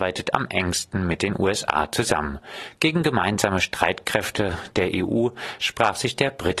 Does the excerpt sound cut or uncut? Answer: cut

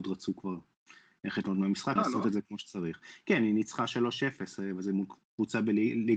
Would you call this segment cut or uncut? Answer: cut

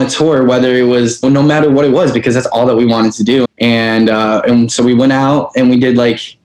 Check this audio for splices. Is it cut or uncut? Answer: cut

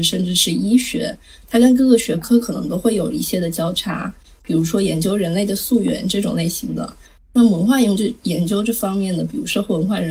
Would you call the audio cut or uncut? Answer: uncut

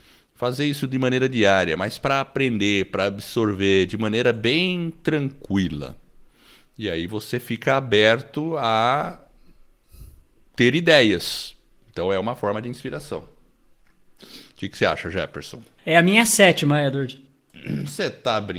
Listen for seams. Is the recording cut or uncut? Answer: uncut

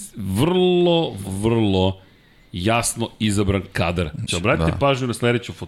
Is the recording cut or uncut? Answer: cut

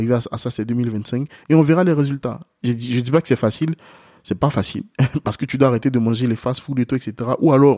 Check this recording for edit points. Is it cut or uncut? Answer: uncut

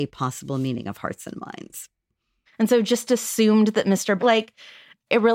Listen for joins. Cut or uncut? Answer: cut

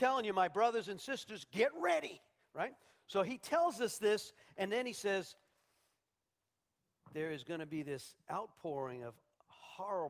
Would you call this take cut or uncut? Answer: uncut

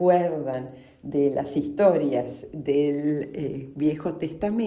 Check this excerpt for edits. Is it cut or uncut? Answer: uncut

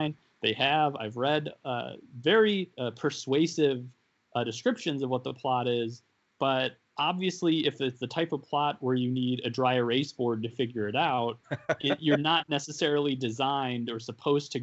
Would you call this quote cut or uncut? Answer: cut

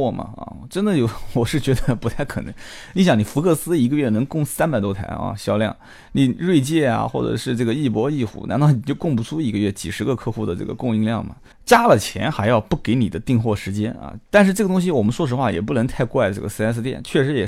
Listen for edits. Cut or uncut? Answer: cut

